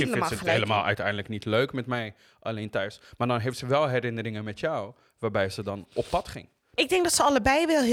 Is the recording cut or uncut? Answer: cut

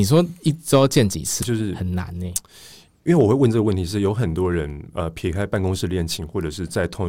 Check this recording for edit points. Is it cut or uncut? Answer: cut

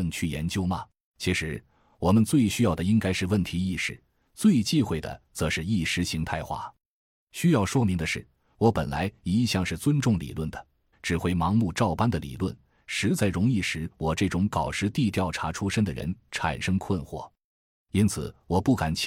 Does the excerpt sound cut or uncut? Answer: cut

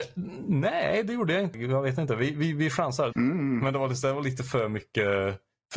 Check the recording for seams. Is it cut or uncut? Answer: cut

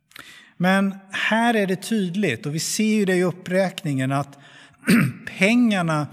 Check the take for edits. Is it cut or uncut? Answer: uncut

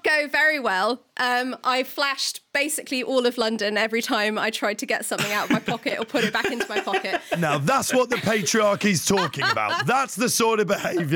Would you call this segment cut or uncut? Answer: uncut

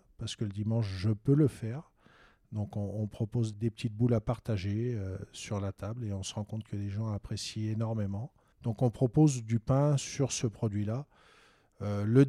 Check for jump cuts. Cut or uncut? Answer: cut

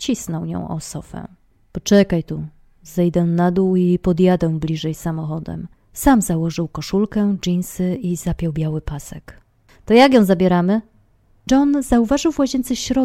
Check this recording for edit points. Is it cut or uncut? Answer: cut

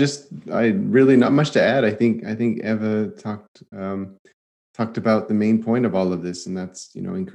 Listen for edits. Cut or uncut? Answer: uncut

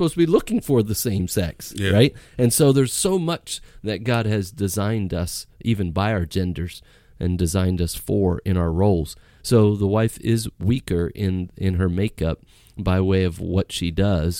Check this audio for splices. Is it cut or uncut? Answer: uncut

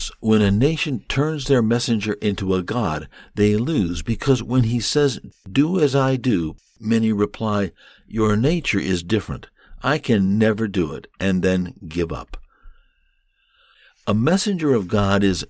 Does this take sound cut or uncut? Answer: uncut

